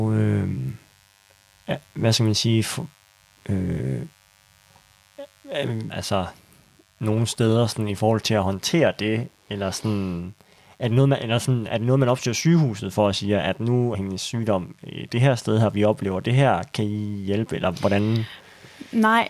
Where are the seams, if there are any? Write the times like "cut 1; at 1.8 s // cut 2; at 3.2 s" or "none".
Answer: cut 1; at 5.9 s // cut 2; at 13.9 s